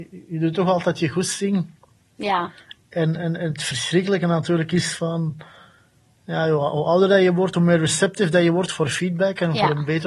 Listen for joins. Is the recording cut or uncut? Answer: uncut